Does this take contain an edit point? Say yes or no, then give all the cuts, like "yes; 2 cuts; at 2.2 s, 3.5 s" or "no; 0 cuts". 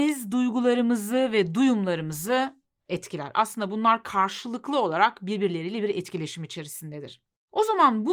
no; 0 cuts